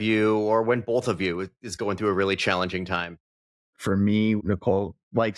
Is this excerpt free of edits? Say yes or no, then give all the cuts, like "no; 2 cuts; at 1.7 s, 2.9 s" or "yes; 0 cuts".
no; 1 cut; at 4.4 s